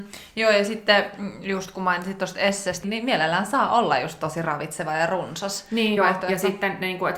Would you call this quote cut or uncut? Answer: cut